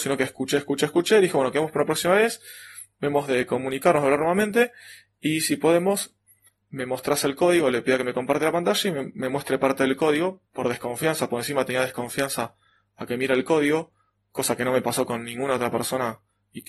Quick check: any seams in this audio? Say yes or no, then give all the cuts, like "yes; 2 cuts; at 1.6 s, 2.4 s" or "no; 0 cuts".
yes; 1 cut; at 10.5 s